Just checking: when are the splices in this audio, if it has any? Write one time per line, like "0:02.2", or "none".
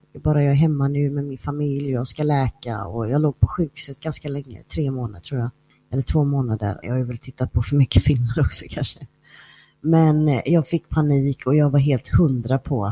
0:06.8

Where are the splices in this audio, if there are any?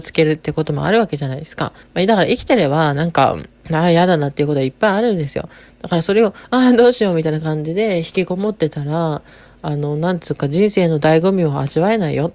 0:01.8

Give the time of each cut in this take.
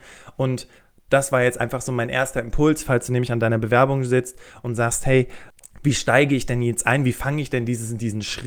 none

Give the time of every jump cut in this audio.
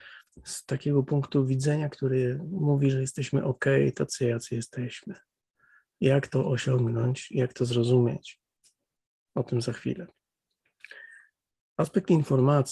none

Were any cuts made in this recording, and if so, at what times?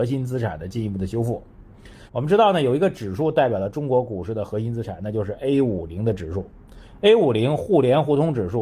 0:02.1

